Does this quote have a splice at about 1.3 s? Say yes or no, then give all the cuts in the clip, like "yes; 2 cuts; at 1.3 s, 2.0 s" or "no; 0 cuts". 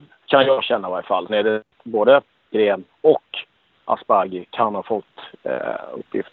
yes; 1 cut; at 1.3 s